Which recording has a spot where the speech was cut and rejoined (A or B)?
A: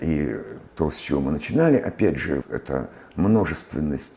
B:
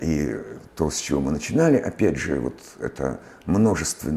A